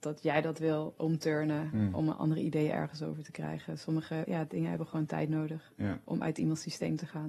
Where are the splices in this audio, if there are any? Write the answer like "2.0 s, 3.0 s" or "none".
4.2 s